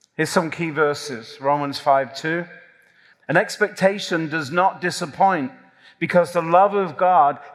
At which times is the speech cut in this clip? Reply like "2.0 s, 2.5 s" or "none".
3.1 s